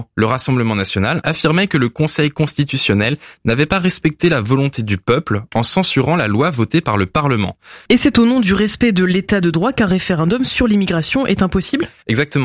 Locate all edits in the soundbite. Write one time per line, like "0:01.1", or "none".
0:01.2
0:07.9